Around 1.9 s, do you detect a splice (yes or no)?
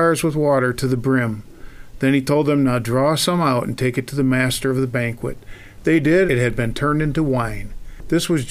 no